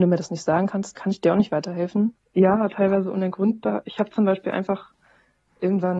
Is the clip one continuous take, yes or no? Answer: no